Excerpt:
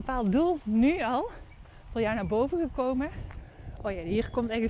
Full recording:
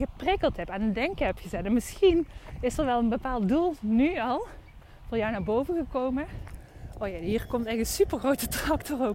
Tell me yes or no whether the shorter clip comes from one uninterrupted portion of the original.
yes